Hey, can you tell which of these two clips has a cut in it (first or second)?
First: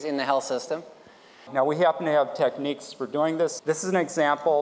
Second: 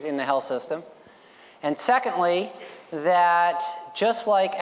first